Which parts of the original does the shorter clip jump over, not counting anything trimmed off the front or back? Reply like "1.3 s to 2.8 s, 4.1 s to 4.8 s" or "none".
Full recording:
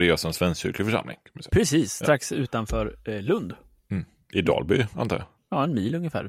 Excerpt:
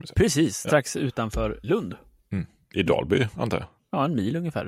3.0 s to 3.2 s